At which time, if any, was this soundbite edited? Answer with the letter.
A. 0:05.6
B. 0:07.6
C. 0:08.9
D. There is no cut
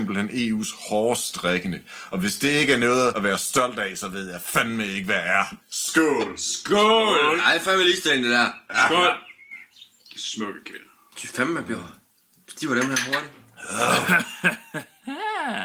A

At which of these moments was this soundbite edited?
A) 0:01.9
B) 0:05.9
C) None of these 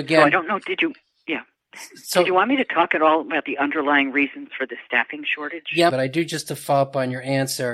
B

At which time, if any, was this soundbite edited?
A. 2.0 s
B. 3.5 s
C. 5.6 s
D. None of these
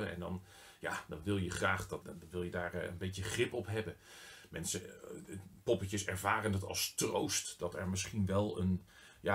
A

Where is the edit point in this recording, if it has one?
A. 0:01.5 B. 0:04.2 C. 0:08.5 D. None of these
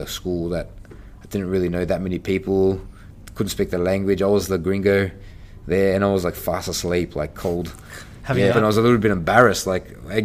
C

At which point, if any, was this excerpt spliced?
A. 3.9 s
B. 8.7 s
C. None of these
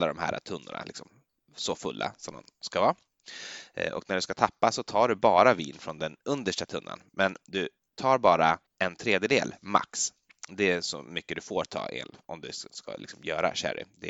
B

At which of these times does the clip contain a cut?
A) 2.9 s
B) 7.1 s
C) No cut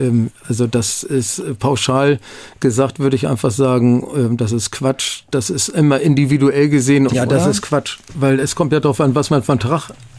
B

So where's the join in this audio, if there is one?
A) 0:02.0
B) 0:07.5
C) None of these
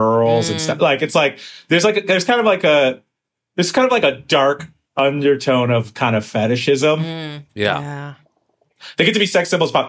B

